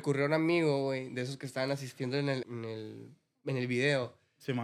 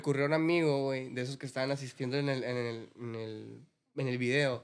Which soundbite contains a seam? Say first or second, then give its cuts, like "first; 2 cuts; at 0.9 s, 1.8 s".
first; 1 cut; at 2.4 s